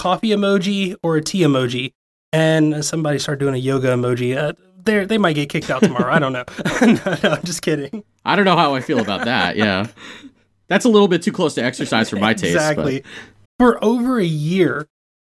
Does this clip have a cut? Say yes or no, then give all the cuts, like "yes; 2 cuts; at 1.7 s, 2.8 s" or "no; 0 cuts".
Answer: yes; 1 cut; at 13.5 s